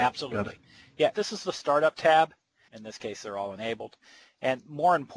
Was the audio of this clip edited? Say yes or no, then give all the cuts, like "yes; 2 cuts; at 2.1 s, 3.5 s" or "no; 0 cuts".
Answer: yes; 2 cuts; at 1.1 s, 2.7 s